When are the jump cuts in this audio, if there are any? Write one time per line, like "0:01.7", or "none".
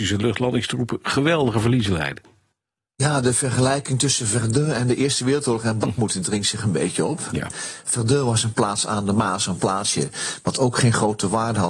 none